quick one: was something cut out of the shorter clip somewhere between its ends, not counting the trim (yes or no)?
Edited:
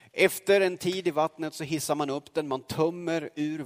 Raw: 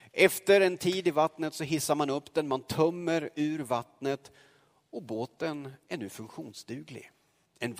no